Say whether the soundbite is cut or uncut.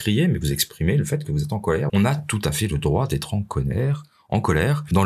cut